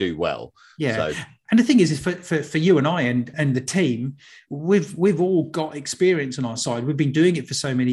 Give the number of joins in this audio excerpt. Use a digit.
1